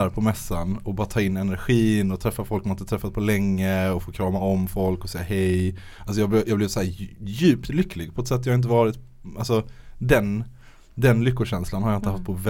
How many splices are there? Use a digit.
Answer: 0